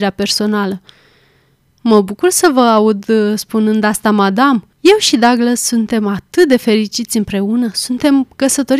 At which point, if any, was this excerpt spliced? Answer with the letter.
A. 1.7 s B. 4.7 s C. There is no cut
B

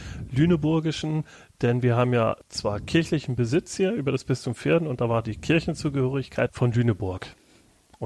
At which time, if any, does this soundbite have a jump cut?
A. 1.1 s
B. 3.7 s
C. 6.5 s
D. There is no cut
C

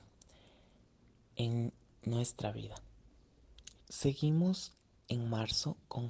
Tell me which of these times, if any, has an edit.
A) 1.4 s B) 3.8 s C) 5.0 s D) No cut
B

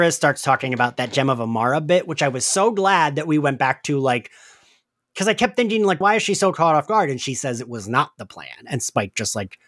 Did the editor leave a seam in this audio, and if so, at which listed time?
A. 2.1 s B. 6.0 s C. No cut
B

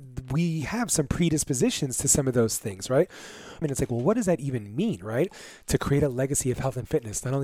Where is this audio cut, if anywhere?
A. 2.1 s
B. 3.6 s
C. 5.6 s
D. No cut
B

